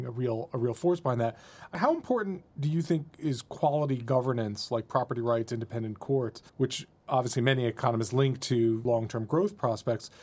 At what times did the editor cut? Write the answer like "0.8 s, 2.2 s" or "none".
6.5 s